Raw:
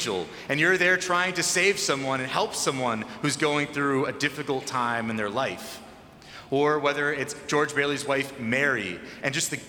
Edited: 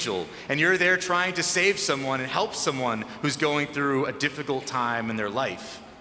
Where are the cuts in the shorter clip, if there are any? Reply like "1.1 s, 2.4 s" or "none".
none